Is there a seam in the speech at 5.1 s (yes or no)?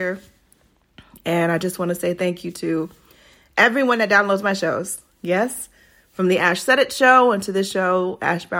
no